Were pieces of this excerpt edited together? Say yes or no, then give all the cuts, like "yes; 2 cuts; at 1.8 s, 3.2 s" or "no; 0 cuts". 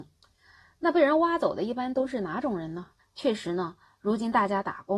yes; 1 cut; at 3.0 s